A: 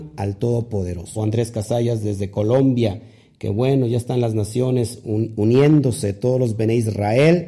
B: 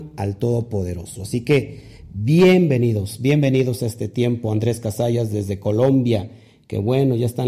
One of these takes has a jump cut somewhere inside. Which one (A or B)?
A